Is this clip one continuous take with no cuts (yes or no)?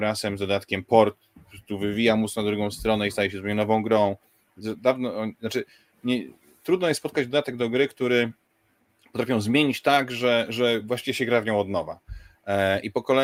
yes